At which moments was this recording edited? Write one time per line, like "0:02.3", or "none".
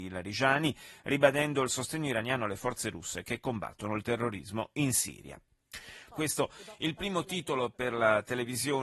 0:06.1